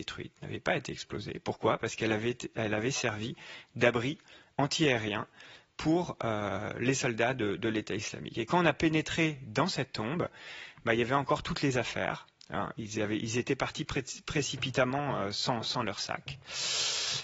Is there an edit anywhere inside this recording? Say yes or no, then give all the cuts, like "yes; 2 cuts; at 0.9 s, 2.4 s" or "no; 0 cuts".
no; 0 cuts